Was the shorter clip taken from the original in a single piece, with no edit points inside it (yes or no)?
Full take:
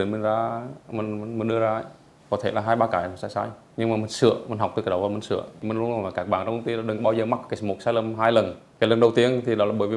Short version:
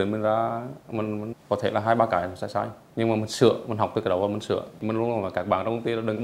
no